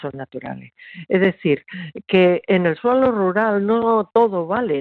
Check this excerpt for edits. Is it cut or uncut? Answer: cut